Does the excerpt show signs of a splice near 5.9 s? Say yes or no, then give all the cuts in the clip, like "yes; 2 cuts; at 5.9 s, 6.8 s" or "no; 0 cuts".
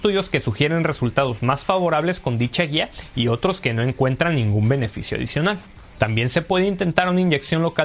yes; 1 cut; at 5.9 s